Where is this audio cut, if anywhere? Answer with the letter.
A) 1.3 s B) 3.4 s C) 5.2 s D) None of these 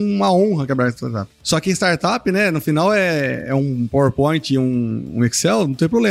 D